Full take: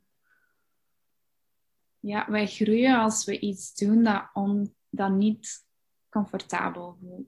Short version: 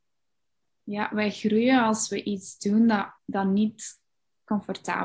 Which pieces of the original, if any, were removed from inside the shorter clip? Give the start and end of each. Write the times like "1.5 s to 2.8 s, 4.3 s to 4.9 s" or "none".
4.3 s to 4.8 s